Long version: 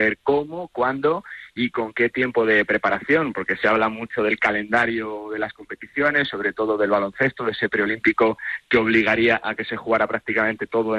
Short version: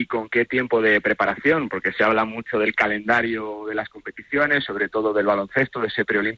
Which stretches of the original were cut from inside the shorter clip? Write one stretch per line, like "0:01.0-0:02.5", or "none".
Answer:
none

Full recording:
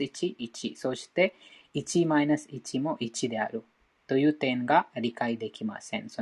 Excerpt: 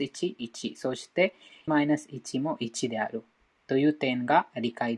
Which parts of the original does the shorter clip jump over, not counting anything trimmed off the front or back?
0:01.7-0:02.1

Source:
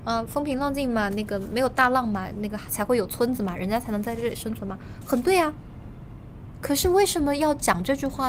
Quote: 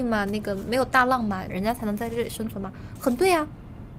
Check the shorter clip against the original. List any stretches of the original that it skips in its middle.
0:02.3-0:03.6

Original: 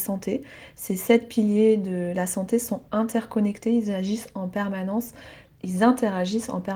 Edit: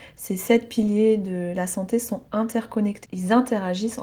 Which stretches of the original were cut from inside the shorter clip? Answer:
0:03.7-0:05.6

